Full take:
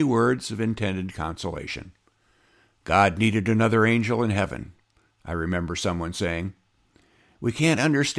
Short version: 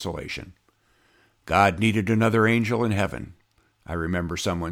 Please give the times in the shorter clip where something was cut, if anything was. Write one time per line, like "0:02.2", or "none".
none